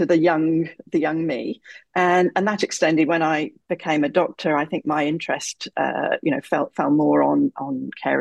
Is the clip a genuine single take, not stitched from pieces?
yes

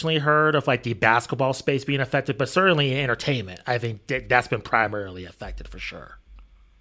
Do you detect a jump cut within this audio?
no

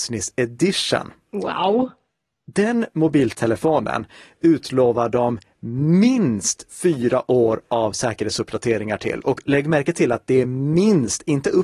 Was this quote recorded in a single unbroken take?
yes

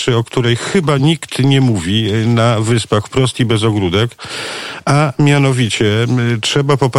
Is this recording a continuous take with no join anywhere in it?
yes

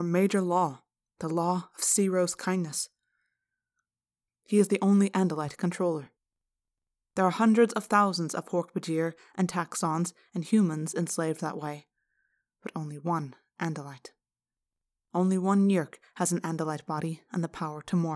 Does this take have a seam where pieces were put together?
yes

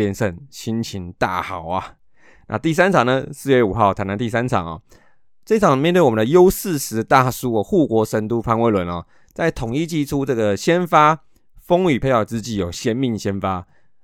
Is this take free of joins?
yes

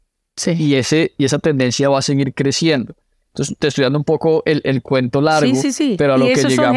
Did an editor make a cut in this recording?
no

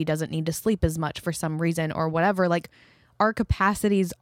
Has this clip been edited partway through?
no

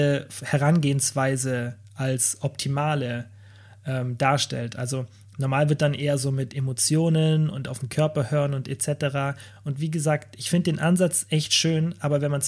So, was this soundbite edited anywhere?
no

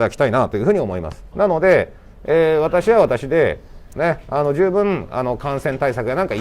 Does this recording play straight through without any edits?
no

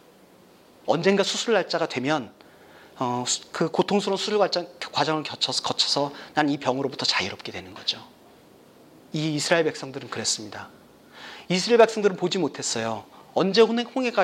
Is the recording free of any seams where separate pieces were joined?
yes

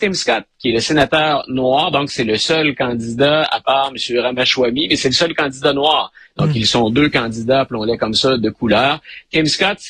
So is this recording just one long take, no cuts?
yes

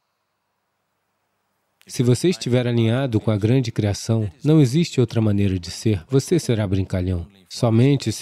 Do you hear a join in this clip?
no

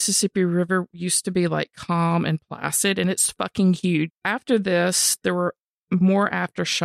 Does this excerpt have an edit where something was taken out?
yes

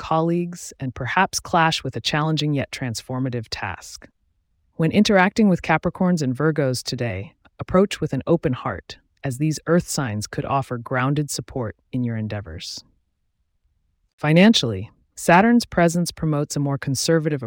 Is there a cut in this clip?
no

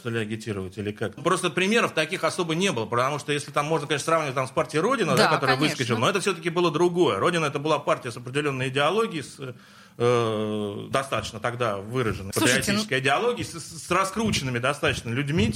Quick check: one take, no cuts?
no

